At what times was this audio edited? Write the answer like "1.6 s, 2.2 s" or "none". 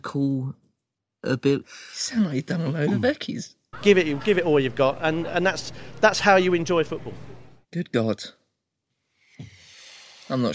1.6 s, 3.7 s